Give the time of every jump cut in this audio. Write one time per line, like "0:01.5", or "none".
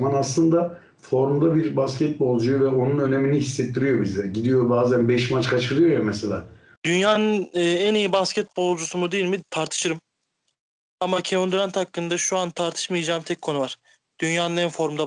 0:06.8